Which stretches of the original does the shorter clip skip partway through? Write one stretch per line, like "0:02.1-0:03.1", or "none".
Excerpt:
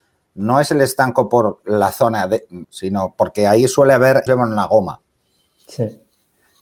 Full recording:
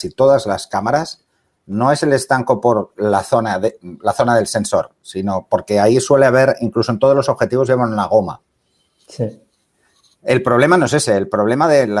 0:04.0-0:05.0
0:06.6-0:07.7